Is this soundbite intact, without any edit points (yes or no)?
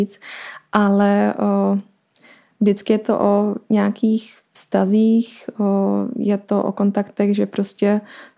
yes